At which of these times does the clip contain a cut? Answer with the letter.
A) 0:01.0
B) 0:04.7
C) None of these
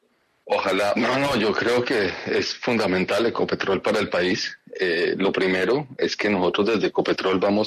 A